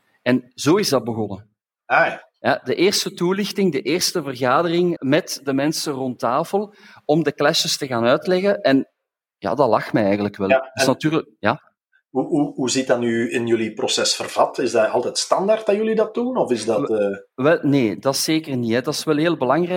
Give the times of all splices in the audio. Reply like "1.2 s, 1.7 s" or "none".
5.0 s